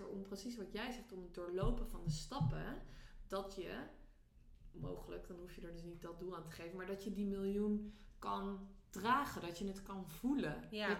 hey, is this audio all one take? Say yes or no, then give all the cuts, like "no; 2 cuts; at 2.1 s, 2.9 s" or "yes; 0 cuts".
yes; 0 cuts